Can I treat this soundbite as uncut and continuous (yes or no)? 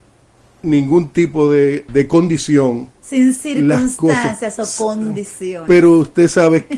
no